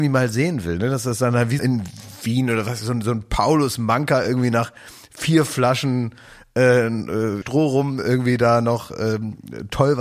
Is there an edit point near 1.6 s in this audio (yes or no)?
yes